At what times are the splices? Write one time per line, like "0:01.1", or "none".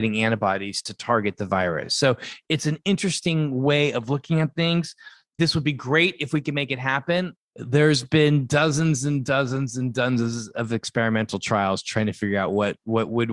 none